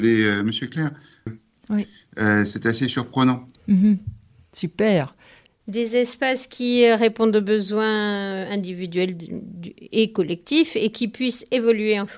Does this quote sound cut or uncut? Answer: cut